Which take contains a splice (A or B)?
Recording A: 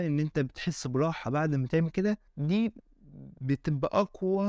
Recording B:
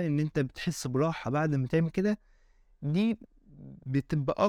A